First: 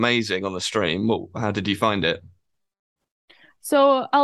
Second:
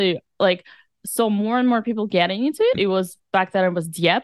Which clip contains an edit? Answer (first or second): second